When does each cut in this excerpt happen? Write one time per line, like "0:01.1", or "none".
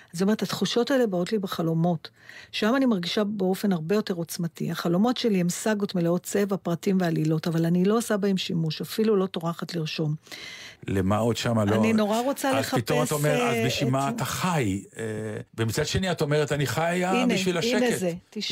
0:10.8
0:15.5